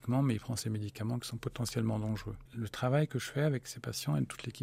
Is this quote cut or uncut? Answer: cut